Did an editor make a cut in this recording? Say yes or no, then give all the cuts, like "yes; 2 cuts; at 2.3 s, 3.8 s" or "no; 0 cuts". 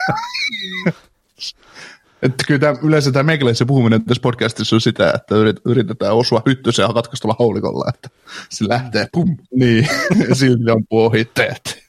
yes; 1 cut; at 9.4 s